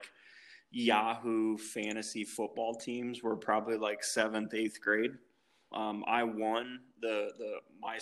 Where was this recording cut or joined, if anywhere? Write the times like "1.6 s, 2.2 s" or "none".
5.7 s